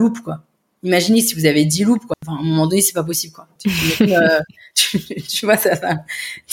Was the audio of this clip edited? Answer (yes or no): yes